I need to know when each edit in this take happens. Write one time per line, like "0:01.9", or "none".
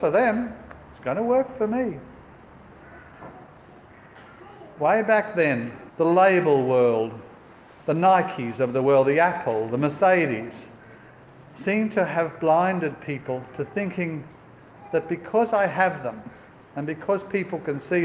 0:05.9